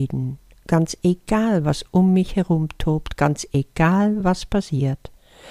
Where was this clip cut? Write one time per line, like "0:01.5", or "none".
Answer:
none